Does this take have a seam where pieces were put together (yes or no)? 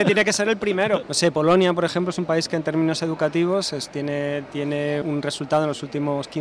yes